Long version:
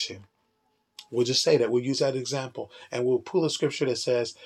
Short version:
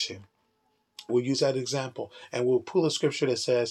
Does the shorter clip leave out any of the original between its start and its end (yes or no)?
yes